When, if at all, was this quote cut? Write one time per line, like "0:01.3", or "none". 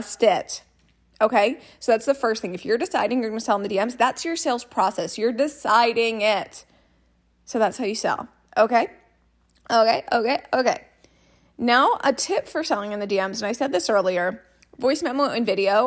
none